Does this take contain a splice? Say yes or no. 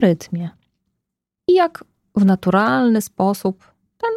yes